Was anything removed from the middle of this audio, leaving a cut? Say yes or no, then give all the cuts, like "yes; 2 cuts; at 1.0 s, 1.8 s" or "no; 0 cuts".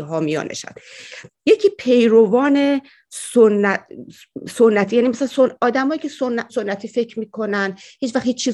yes; 1 cut; at 6.5 s